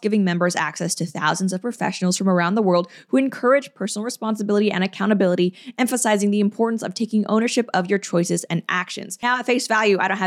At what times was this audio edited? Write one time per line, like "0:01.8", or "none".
none